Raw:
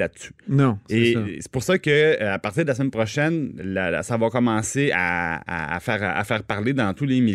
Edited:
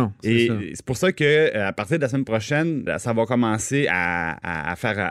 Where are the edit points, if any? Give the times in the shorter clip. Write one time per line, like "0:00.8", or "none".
0:02.9